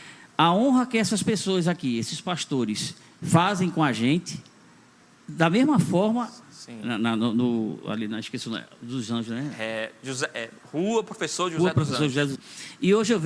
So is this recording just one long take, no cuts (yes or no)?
no